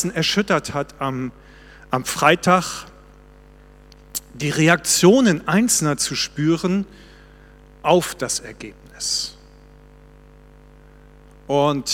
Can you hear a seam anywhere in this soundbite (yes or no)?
no